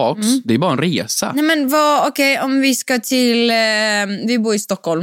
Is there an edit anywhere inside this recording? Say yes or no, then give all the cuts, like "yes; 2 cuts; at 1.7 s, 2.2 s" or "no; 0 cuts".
no; 0 cuts